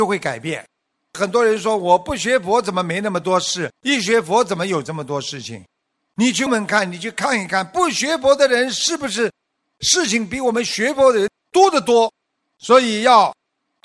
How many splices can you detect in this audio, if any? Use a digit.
1